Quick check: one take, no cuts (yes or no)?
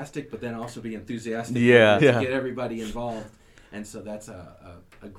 no